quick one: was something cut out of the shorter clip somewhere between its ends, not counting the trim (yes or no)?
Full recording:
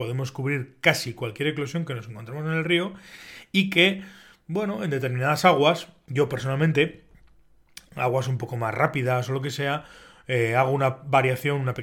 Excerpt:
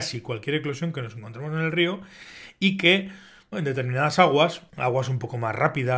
yes